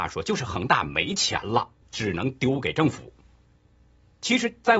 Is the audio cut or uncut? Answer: cut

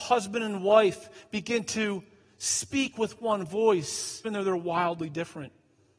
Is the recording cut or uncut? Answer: cut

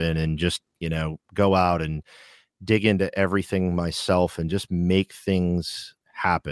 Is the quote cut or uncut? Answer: uncut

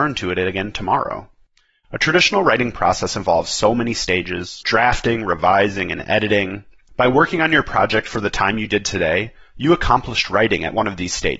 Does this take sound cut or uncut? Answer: cut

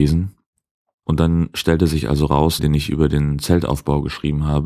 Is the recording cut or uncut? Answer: cut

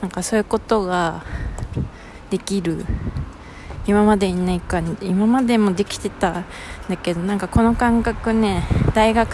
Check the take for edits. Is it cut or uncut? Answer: uncut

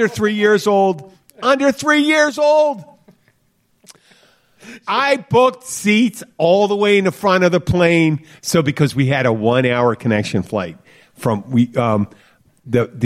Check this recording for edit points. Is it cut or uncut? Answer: uncut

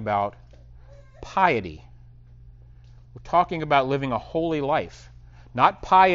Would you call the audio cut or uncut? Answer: uncut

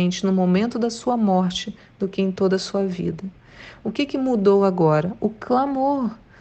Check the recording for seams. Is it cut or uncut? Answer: uncut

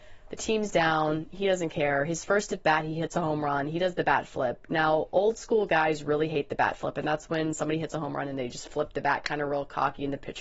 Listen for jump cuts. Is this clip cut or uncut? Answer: uncut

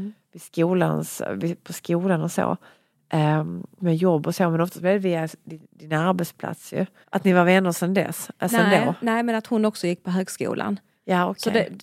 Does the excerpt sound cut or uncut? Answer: cut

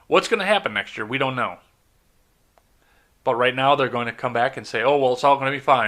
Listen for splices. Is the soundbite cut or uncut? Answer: uncut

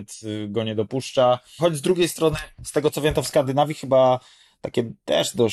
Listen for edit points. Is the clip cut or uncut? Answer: cut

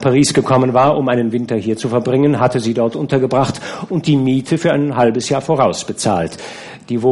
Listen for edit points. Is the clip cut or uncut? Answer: uncut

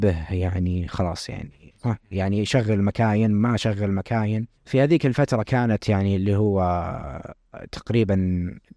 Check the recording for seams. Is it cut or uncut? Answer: cut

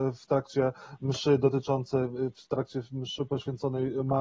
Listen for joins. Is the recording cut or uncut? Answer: uncut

